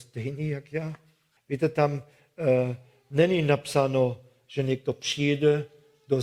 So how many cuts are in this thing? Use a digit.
1